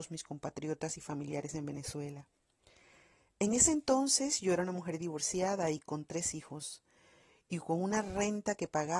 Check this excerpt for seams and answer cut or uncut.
uncut